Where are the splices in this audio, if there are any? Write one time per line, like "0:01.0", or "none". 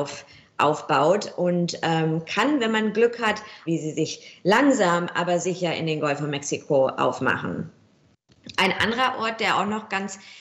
0:03.7